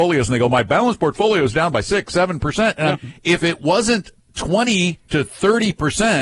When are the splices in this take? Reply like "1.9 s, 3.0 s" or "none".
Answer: 2.9 s